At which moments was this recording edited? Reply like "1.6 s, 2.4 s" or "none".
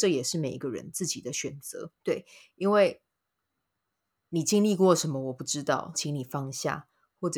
2.0 s, 5.9 s